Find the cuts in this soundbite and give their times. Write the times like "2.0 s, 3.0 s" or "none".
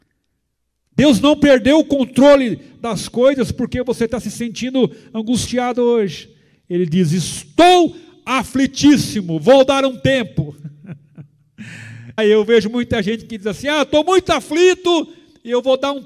12.2 s